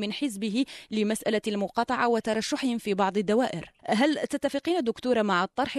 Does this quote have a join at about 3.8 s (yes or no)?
yes